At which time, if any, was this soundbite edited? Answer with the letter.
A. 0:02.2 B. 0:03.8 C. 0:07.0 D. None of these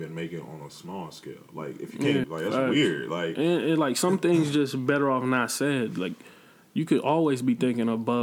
A